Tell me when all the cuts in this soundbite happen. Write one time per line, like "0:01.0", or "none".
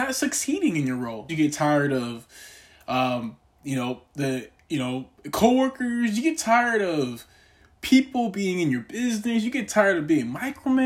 0:01.3